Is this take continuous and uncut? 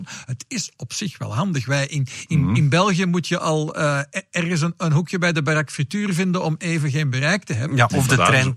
yes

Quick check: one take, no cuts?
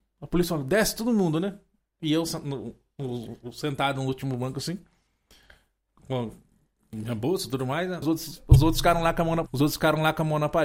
no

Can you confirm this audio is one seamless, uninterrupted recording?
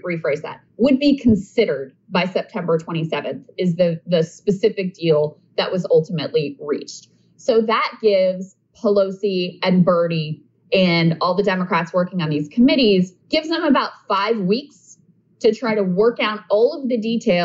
no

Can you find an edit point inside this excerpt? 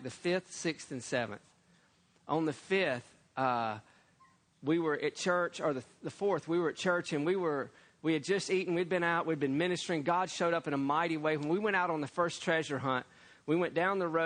no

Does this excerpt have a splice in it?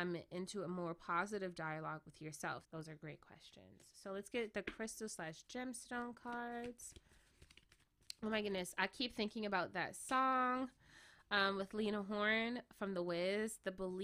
yes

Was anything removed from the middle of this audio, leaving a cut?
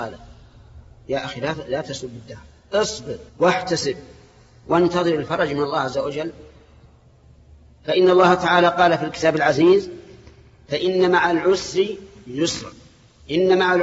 yes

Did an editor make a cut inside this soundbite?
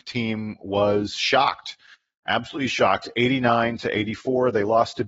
no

